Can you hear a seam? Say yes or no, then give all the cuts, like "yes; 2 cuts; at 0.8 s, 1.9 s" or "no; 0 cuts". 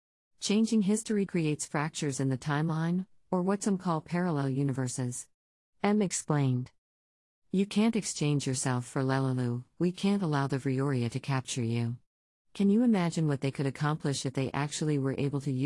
yes; 1 cut; at 1.3 s